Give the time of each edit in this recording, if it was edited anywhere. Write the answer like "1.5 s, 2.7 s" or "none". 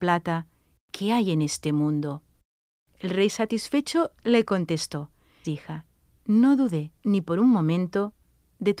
5.4 s, 7.0 s